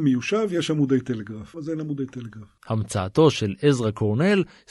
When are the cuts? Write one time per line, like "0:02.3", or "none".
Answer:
0:01.5